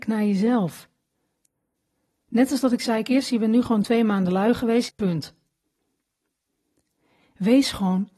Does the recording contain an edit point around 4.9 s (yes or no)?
yes